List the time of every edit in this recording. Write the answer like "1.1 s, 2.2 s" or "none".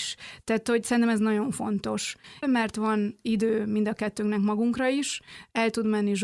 2.4 s